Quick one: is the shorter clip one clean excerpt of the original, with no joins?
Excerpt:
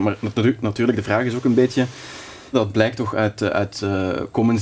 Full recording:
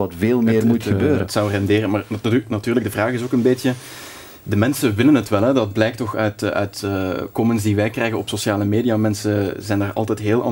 no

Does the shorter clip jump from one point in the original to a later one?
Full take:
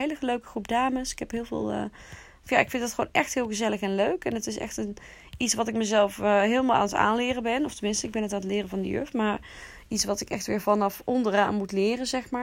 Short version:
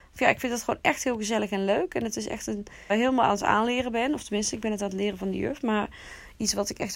yes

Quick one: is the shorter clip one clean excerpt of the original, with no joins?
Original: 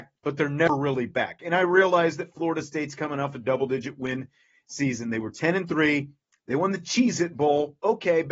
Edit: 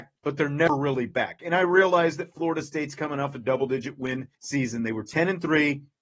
no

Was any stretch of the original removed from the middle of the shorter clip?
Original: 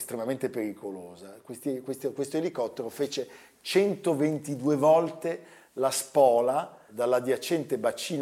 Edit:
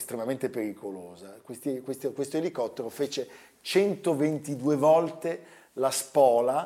no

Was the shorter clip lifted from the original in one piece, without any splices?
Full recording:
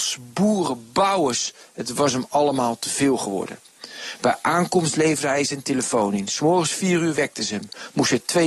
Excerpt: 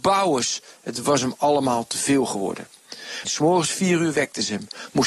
no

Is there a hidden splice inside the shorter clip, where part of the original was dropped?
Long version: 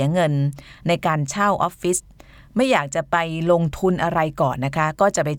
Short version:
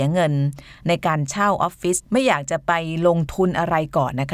yes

